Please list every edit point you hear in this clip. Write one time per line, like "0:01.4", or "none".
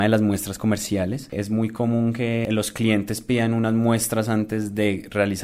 none

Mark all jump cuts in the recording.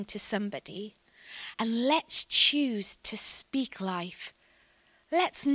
0:01.5

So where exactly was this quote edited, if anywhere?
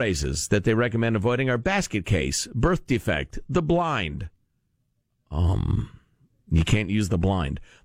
none

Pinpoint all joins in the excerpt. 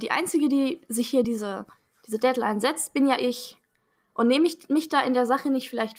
none

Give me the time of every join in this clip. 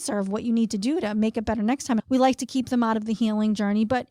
0:02.0

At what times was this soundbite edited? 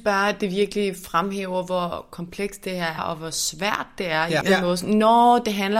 0:03.0
0:04.4

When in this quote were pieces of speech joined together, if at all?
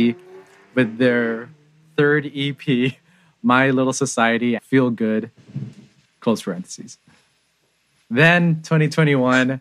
0:04.6
0:06.1

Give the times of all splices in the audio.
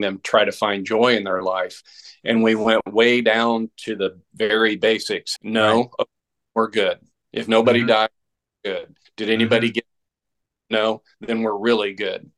0:05.4

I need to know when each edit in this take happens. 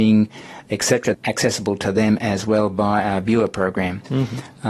0:01.1

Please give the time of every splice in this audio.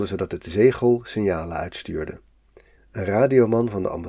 0:02.8

